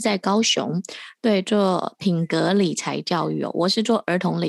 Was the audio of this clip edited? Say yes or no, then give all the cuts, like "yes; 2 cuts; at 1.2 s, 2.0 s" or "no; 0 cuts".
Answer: no; 0 cuts